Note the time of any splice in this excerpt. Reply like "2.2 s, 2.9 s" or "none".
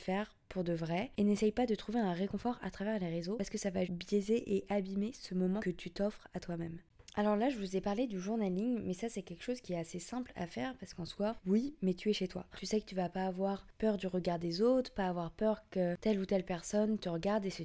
3.8 s, 11.4 s, 12.5 s